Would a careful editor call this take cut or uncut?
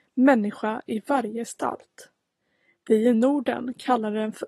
uncut